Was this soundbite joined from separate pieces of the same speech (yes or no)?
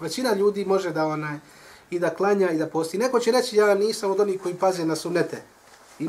no